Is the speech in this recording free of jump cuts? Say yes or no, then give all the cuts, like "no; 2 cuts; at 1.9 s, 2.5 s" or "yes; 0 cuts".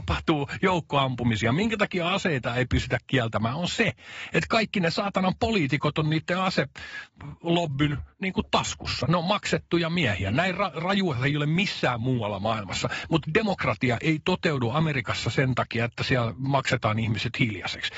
yes; 0 cuts